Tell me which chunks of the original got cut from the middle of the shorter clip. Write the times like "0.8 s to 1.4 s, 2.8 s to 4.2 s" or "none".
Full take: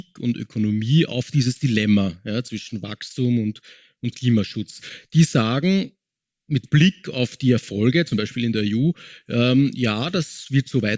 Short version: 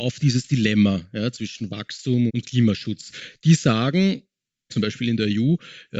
3.4 s to 4.0 s, 6.4 s to 8.1 s